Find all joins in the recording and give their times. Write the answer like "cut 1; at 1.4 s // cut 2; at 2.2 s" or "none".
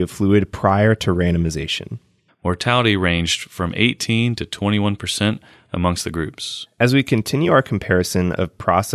cut 1; at 2.3 s